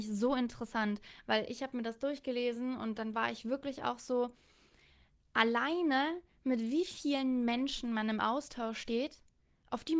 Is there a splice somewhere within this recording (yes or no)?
no